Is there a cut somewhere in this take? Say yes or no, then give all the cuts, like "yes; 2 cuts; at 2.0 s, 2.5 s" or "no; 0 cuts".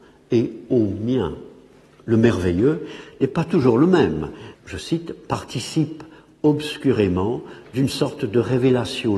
yes; 2 cuts; at 2.0 s, 4.5 s